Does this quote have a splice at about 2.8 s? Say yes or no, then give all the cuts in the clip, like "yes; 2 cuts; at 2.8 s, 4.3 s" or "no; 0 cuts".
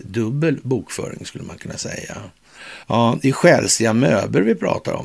yes; 1 cut; at 2.8 s